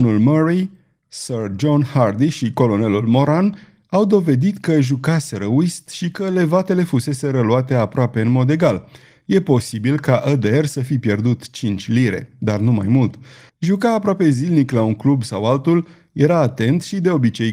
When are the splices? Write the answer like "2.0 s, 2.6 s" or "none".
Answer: 13.5 s